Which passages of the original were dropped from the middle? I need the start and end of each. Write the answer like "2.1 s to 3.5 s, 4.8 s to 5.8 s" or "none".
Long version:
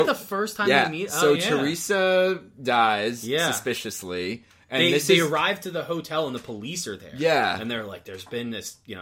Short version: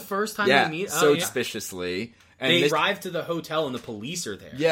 1.4 s to 3.5 s, 5.0 s to 5.3 s